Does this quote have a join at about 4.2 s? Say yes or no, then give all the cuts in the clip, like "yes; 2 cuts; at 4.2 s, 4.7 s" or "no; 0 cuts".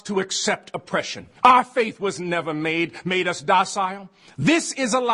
no; 1 cut; at 1.4 s